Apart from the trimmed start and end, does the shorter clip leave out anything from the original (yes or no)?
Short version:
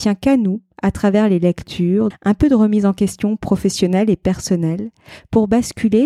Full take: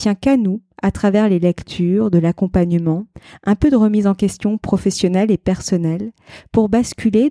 yes